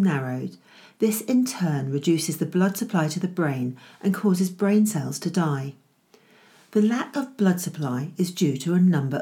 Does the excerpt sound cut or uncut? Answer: uncut